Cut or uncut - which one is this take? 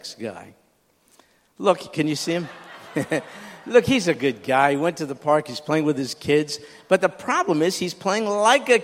uncut